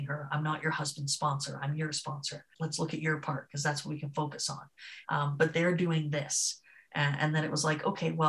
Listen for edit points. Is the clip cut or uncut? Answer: cut